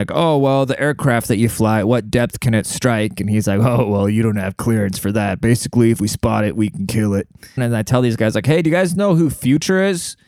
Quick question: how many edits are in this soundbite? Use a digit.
1